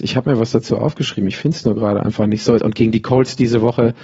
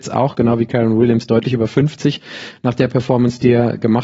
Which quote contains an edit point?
first; 1 cut; at 2.6 s

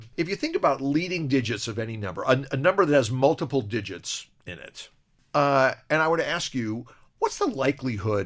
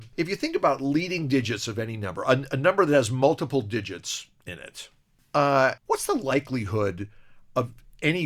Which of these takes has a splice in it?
second; 1 cut; at 5.8 s

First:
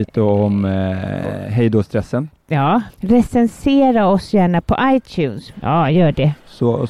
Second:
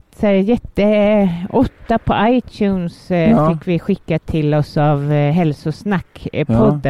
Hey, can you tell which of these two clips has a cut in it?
first; 2 cuts; at 2.9 s, 5.5 s

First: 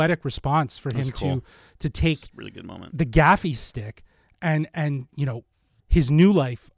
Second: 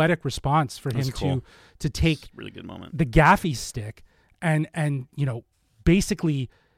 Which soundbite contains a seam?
first; 1 cut; at 5.8 s

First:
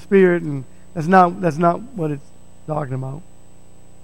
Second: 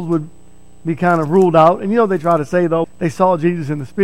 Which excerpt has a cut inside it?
second; 1 cut; at 2.8 s

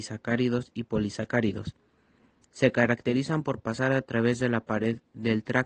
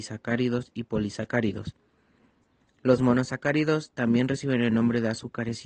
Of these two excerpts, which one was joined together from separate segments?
first; 1 cut; at 2.4 s

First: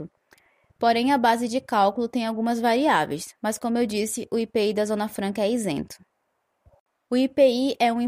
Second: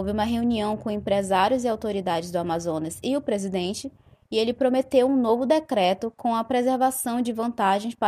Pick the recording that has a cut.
first; 1 cut; at 7.0 s

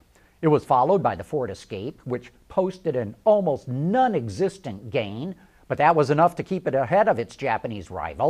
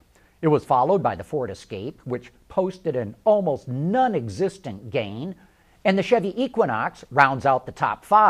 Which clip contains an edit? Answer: first; 1 cut; at 5.5 s

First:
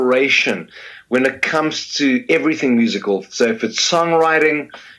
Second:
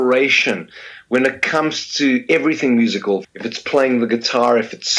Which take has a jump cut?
second; 1 cut; at 3.2 s

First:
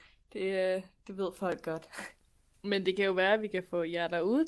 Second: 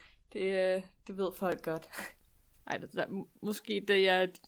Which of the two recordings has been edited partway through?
second; 1 cut; at 2.6 s

